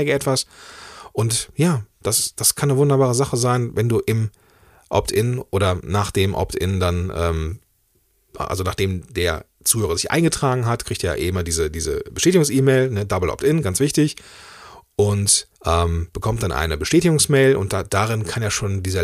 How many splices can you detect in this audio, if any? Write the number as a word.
one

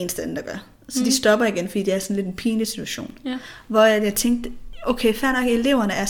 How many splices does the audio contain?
zero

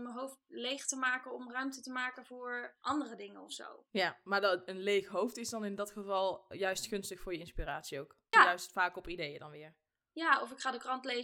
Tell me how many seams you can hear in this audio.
two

